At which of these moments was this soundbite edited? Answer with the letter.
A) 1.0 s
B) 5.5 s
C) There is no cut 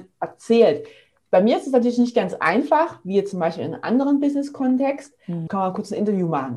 B